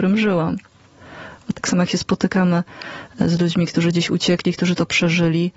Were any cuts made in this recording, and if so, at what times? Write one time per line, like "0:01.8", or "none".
0:01.5